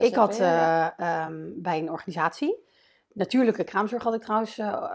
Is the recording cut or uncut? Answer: uncut